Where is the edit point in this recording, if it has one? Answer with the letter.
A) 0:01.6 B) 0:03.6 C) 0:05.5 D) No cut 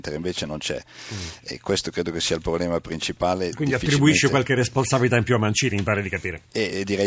A